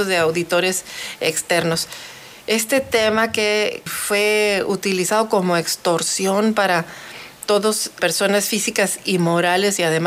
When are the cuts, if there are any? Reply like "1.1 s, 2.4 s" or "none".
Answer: 3.9 s, 8.0 s